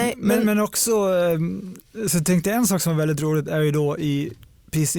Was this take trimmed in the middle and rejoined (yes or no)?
no